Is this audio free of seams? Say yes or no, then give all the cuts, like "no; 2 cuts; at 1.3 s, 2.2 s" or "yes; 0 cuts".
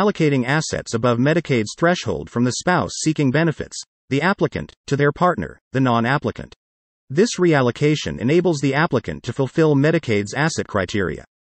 yes; 0 cuts